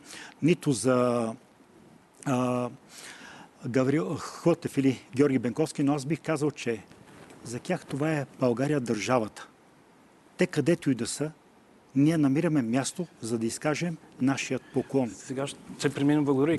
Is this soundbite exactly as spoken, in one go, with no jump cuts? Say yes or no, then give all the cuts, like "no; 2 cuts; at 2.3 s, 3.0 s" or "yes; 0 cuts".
yes; 0 cuts